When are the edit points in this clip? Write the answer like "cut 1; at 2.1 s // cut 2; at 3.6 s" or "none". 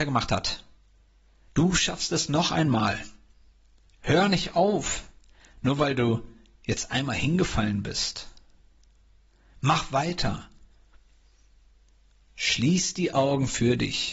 none